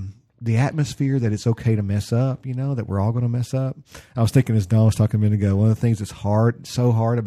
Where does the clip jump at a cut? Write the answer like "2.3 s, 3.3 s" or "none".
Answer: none